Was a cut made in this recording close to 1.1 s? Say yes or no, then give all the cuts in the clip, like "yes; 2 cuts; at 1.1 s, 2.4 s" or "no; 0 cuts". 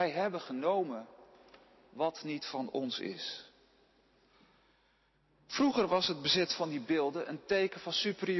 no; 0 cuts